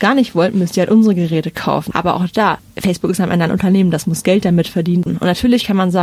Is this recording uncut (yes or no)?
no